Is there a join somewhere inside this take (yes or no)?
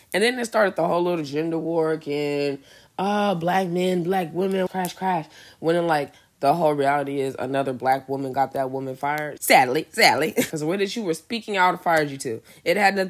yes